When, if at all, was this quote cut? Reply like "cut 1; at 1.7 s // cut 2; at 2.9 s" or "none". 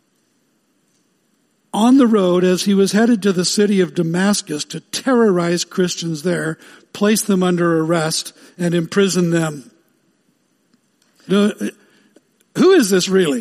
cut 1; at 11.3 s